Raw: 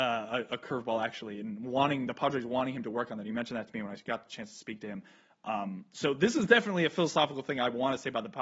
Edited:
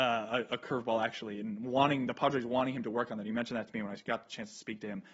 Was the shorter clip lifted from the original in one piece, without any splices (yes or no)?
yes